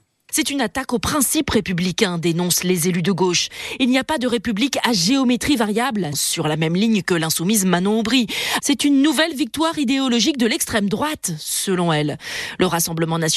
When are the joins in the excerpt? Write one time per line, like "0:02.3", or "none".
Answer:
0:06.1
0:08.6